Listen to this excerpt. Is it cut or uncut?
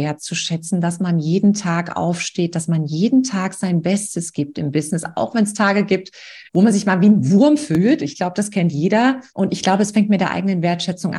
cut